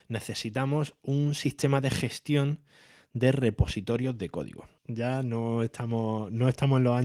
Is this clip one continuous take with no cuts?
no; 1 cut; at 4.8 s

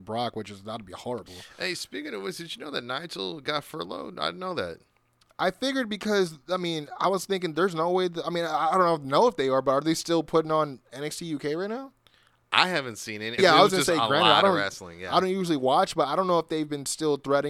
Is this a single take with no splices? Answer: no; 1 cut; at 13.4 s

